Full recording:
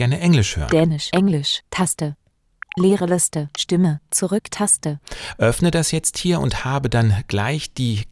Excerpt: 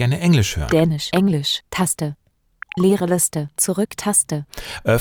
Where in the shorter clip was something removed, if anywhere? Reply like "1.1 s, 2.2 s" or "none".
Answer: 3.5 s